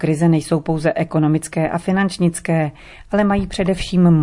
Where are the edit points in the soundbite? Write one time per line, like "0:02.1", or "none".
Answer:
none